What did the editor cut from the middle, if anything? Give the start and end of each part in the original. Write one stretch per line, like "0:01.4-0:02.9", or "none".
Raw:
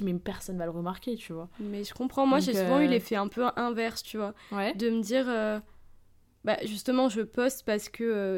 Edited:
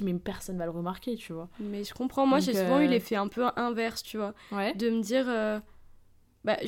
none